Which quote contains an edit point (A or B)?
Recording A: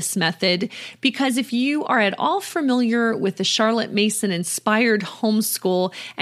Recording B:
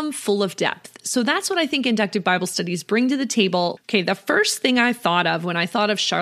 B